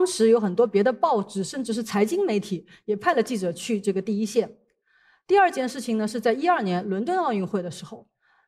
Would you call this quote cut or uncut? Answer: uncut